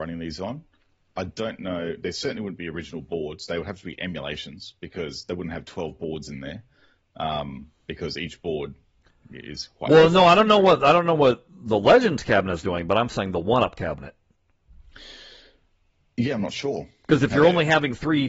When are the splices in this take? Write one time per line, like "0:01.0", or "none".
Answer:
none